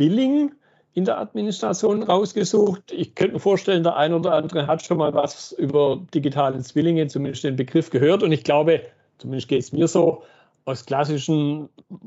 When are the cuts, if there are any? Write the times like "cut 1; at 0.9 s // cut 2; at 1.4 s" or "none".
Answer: none